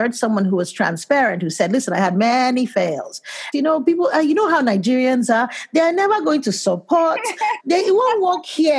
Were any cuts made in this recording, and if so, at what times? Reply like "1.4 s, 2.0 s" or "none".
3.5 s, 7.6 s

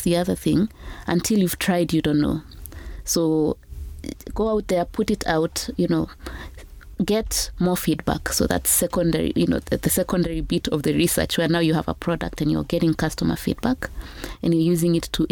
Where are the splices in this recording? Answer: none

